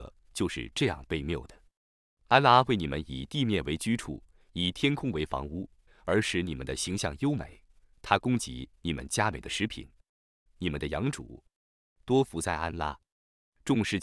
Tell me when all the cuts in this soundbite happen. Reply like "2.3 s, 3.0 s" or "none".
5.9 s, 10.5 s

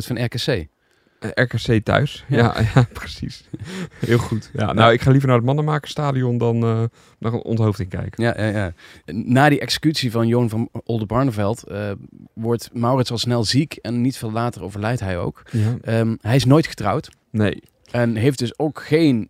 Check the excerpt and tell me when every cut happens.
none

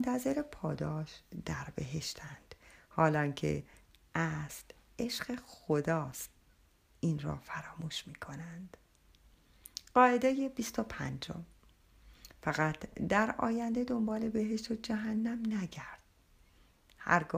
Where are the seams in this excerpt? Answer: none

